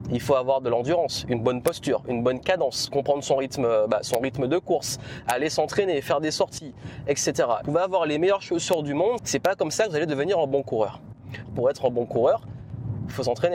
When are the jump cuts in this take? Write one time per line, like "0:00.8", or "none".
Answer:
0:07.6
0:09.2
0:11.5